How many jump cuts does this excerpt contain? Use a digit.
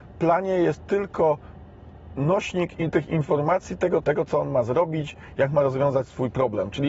2